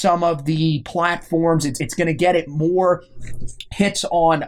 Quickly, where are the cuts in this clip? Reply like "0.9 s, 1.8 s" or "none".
none